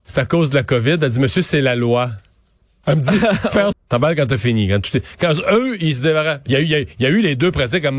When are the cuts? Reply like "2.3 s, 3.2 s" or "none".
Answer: 3.7 s, 6.5 s

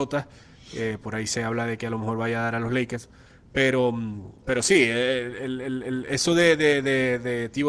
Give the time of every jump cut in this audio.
4.4 s

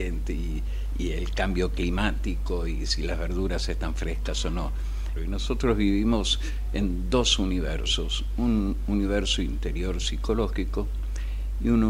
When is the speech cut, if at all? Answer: 5.2 s

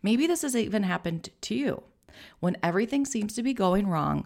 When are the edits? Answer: none

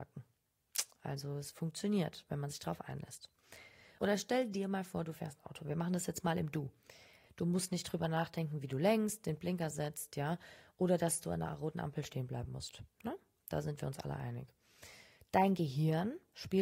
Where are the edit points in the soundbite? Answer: 4.0 s, 7.3 s

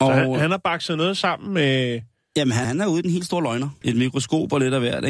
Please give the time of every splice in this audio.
2.6 s, 3.8 s

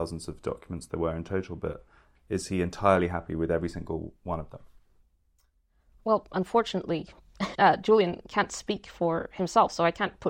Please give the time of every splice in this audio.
7.5 s

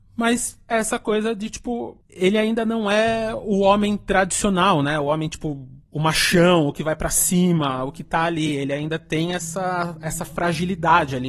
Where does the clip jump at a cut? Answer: none

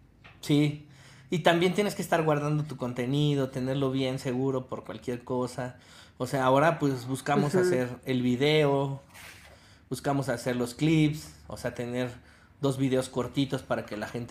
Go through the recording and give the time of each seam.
none

